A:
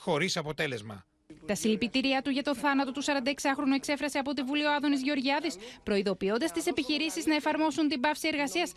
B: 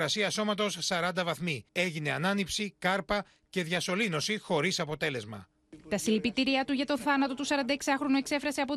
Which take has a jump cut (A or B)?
B